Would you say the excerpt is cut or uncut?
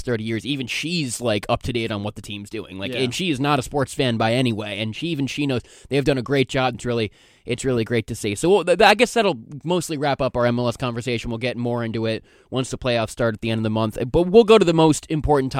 cut